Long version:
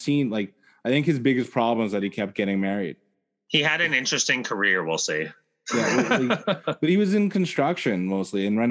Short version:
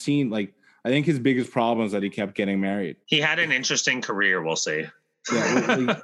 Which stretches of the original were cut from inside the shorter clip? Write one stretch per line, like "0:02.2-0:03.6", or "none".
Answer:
0:03.0-0:03.4